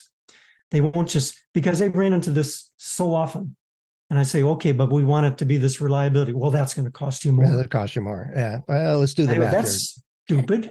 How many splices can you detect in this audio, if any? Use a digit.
1